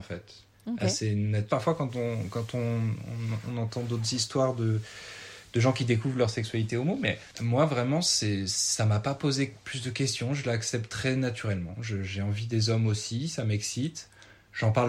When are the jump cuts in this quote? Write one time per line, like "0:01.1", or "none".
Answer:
0:01.5